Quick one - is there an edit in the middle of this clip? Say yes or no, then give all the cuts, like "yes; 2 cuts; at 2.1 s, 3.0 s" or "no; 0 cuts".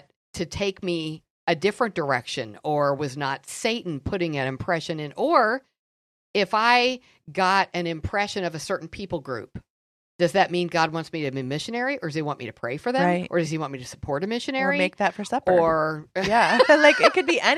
no; 0 cuts